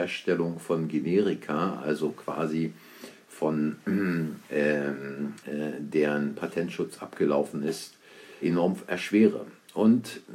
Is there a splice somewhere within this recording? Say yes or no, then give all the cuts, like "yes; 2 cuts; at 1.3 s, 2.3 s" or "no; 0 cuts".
yes; 2 cuts; at 5.4 s, 8.4 s